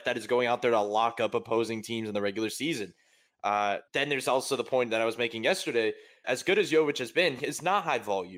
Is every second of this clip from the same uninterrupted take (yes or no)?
no